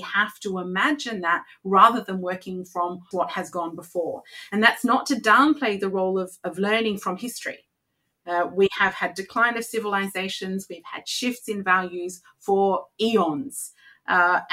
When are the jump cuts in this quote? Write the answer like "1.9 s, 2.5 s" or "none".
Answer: 3.1 s

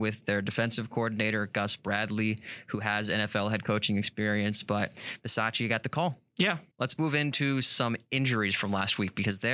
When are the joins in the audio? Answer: 6.7 s

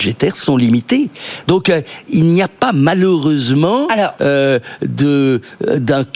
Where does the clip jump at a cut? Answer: none

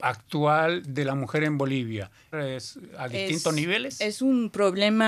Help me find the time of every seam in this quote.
2.3 s

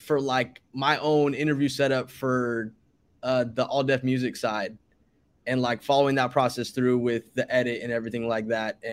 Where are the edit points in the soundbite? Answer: none

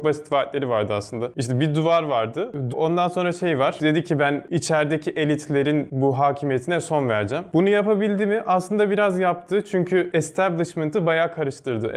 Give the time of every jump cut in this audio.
2.7 s

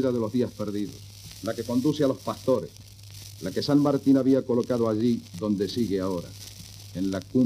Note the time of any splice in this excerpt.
3.4 s

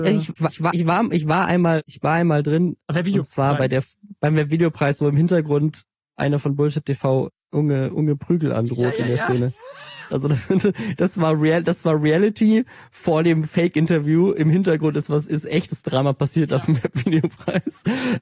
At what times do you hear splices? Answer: 10.1 s

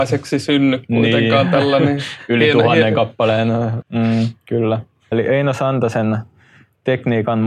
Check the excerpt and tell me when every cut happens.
3.8 s, 5.1 s

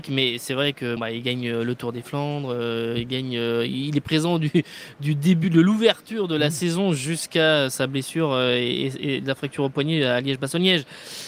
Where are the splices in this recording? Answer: 1.0 s

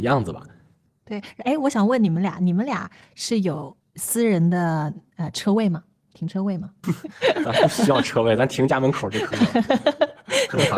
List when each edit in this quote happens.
6.8 s

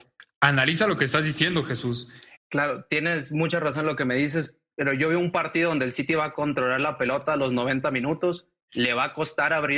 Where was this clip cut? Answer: 2.3 s

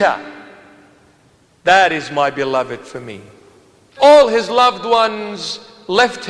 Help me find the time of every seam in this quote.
4.0 s

